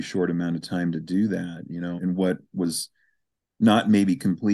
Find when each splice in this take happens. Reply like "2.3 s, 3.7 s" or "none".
2.0 s

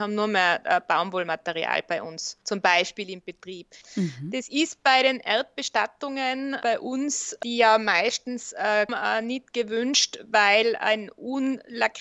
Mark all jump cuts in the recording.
2.4 s, 3.8 s, 8.9 s

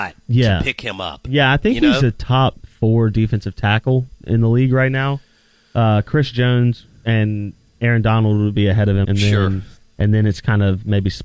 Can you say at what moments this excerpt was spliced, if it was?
9.0 s

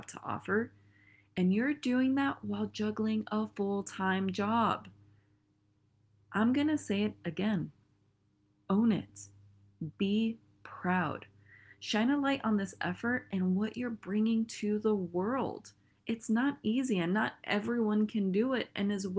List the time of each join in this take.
none

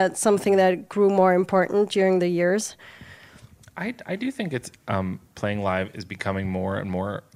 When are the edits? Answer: none

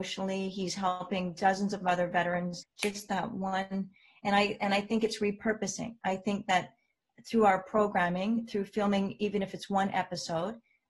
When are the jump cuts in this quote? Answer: 2.6 s

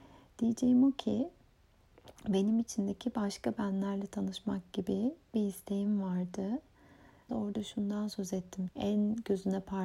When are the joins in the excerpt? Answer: 7.3 s, 8.7 s

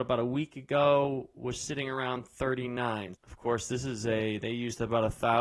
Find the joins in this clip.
3.1 s

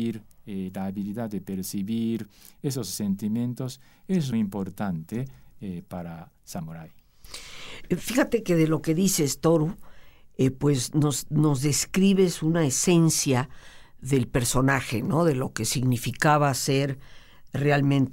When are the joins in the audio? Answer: 4.3 s

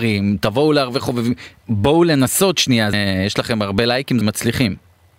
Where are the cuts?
2.9 s, 4.2 s

